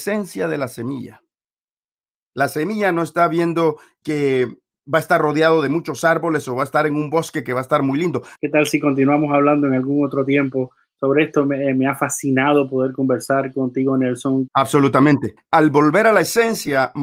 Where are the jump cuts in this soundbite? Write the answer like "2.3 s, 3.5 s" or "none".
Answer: 4.0 s, 8.4 s, 14.5 s